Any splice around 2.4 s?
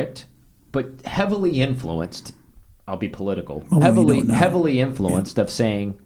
no; 1 cut; at 3.8 s

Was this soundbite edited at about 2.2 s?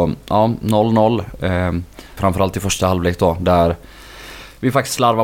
yes; 1 cut; at 2.2 s

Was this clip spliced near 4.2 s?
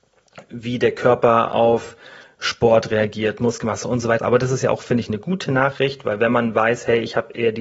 yes; 1 cut; at 4.2 s

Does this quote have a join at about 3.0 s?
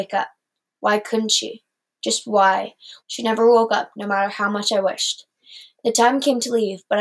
yes; 1 cut; at 3.0 s

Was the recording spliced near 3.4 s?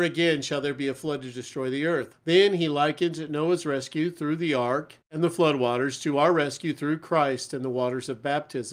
no; 2 cuts; at 2.1 s, 5.0 s

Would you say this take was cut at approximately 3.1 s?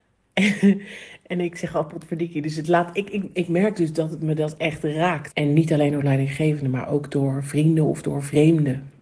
no; 1 cut; at 5.3 s

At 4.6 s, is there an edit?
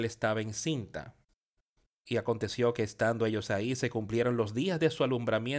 no; 1 cut; at 1.8 s

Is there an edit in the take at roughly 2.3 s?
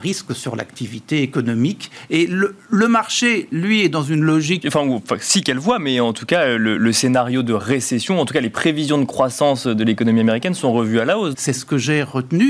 no; 2 cuts; at 4.6 s, 11.3 s

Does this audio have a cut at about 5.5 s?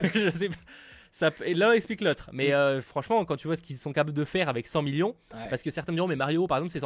no; 0 cuts

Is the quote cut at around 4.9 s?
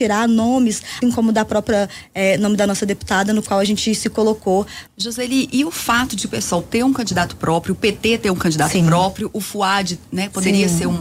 yes; 2 cuts; at 1.0 s, 4.9 s

